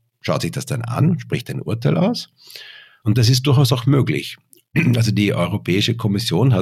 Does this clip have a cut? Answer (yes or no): yes